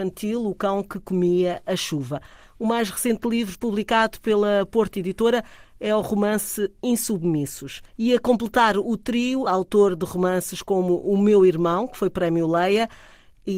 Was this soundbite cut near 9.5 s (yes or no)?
yes